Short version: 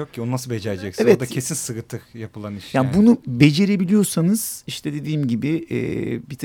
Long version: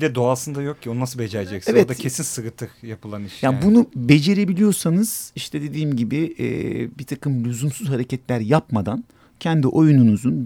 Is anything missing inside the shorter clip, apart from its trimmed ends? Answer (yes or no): no